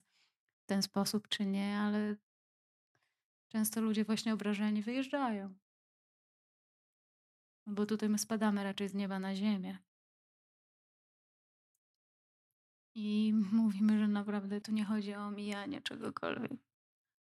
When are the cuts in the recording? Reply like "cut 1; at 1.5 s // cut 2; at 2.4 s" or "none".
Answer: cut 1; at 14.6 s